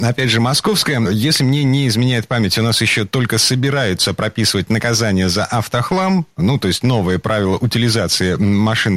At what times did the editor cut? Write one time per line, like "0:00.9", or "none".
none